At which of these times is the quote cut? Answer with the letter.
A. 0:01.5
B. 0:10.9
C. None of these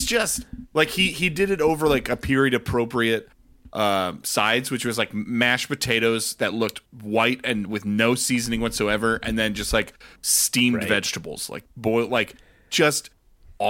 C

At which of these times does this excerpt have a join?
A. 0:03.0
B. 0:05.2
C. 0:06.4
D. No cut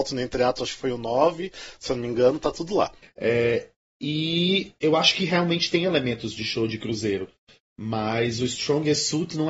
A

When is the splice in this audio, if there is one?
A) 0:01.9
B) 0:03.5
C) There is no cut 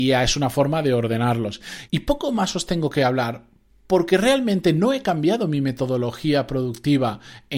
A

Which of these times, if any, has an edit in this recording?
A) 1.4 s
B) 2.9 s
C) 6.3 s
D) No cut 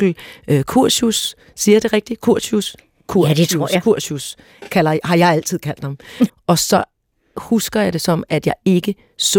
C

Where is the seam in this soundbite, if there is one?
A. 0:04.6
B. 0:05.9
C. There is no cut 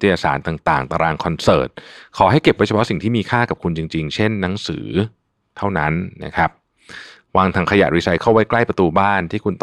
C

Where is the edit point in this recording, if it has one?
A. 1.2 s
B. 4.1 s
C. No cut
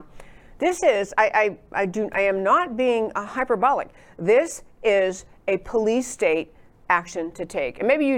C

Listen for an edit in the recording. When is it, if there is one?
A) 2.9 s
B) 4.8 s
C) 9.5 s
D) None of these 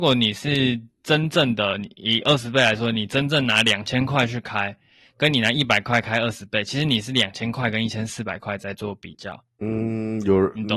D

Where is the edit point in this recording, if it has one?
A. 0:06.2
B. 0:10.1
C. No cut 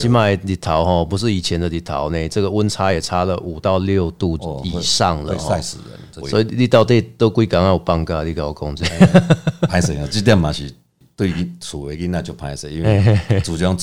A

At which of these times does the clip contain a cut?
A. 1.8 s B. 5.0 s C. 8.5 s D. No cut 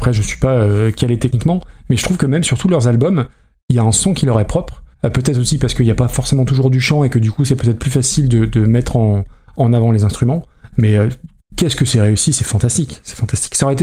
D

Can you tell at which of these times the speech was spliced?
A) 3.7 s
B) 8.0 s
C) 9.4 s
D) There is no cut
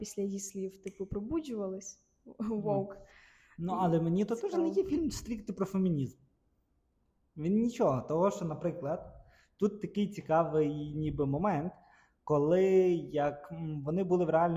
D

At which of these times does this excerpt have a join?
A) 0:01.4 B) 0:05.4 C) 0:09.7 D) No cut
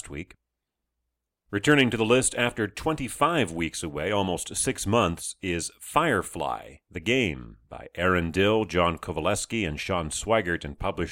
D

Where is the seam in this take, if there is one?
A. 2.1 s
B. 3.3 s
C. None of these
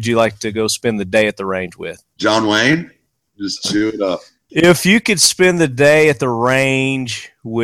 B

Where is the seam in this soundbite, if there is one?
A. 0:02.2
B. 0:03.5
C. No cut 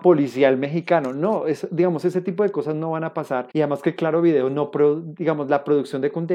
B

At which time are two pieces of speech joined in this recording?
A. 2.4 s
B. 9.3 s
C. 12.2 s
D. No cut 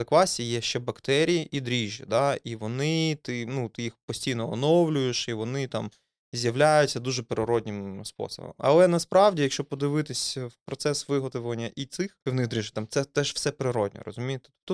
C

